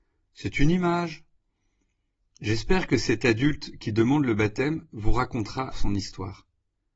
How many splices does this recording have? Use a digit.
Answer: 1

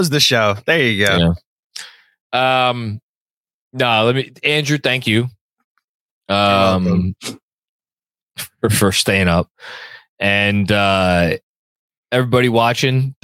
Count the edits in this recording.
0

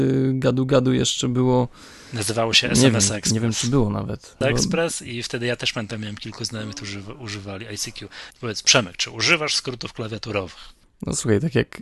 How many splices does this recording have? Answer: 2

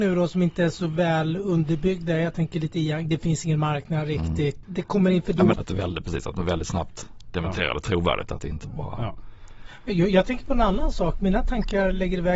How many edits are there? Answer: 1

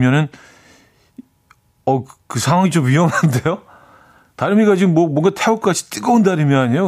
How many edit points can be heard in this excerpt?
0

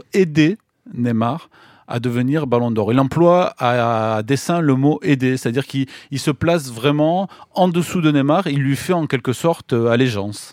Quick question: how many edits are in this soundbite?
0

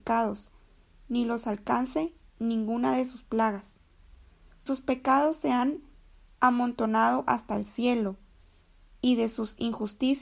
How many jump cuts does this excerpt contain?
1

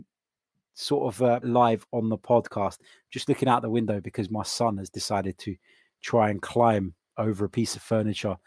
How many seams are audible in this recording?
1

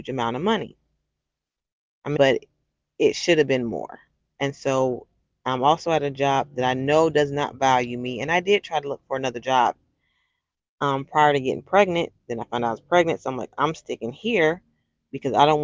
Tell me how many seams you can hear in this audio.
1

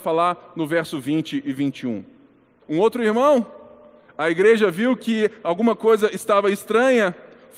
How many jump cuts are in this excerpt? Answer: 1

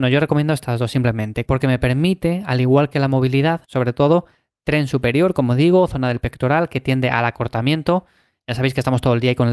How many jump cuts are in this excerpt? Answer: 2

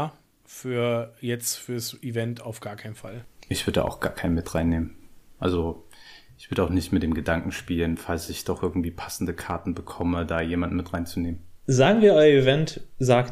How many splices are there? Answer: 0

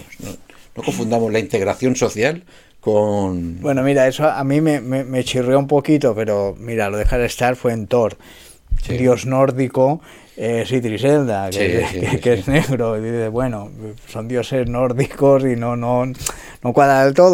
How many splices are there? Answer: 1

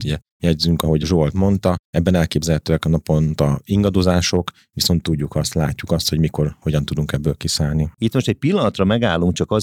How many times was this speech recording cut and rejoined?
1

